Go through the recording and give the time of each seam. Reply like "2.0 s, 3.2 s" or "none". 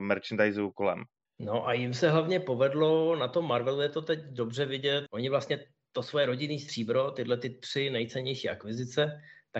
1.3 s, 5.1 s